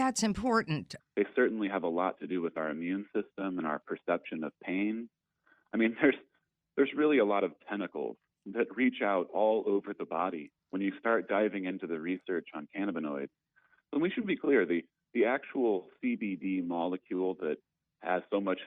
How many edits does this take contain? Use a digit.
1